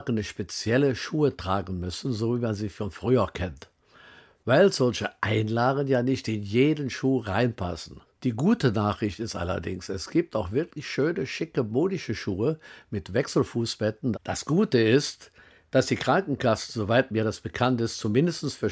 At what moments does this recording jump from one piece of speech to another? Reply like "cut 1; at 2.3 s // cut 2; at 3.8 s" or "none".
cut 1; at 8.1 s // cut 2; at 14.1 s